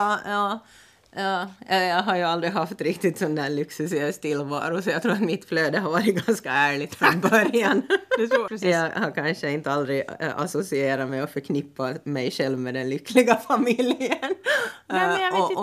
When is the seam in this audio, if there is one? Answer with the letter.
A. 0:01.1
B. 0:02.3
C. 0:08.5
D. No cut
C